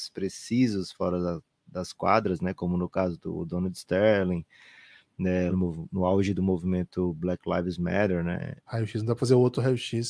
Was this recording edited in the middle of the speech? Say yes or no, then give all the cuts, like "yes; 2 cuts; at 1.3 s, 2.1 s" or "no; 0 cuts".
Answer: yes; 2 cuts; at 5.5 s, 8.7 s